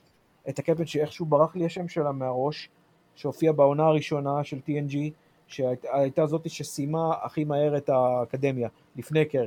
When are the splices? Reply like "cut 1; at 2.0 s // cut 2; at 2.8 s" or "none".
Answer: none